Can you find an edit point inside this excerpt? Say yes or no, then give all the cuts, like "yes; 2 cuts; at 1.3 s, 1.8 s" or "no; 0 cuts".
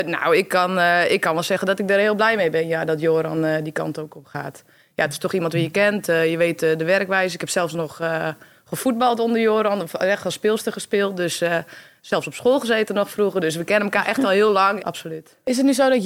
yes; 1 cut; at 14.8 s